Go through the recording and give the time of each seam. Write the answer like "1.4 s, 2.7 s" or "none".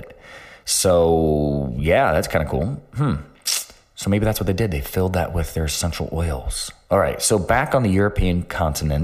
none